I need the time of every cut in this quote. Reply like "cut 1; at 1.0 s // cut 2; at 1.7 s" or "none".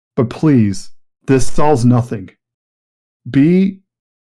none